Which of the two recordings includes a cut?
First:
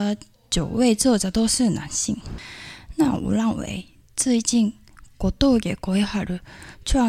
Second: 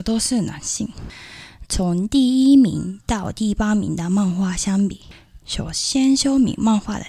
second; 2 cuts; at 1.7 s, 5.4 s

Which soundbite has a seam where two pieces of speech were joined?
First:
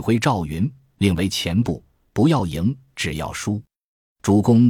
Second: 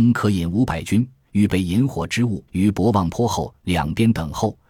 second; 1 cut; at 2.5 s

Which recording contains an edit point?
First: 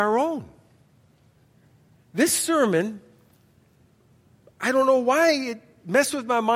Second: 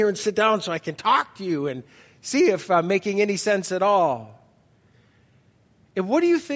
first; 1 cut; at 1.9 s

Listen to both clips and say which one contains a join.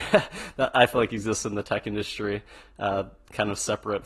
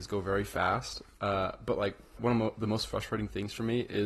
second; 1 cut; at 2.2 s

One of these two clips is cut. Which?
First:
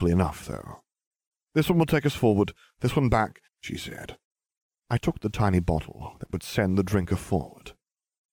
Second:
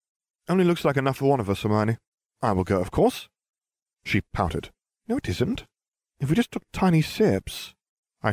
first; 1 cut; at 3.5 s

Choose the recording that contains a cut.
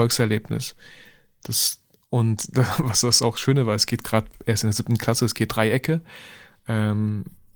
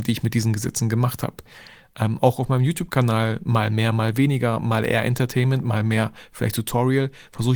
first; 1 cut; at 5.5 s

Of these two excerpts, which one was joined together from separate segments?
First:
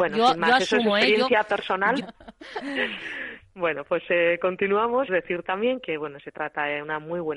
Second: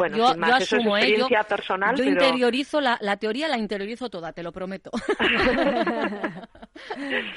first; 2 cuts; at 2.0 s, 5.1 s

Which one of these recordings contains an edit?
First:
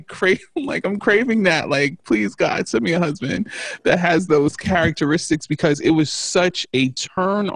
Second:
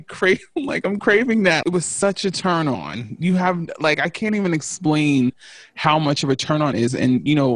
second; 1 cut; at 1.6 s

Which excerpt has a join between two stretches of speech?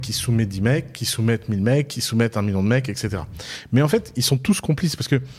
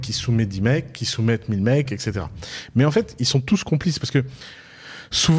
second; 1 cut; at 1.9 s

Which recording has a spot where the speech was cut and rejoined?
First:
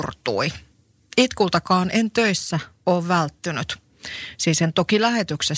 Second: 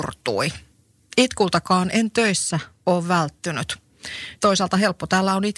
second; 1 cut; at 4.4 s

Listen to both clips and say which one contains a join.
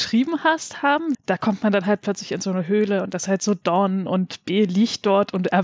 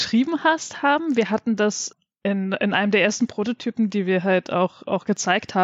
first; 1 cut; at 1.1 s

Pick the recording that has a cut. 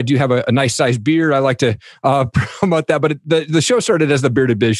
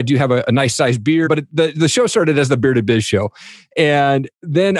second; 1 cut; at 1.3 s

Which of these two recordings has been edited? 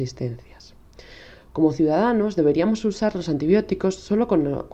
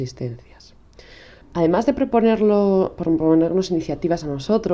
second; 1 cut; at 1.4 s

